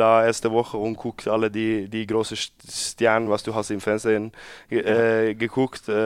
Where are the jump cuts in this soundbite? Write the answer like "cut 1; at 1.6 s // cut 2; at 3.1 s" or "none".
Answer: none